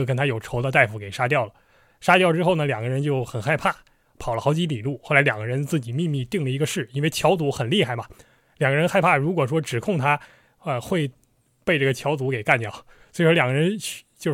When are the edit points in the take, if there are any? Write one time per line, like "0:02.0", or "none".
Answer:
none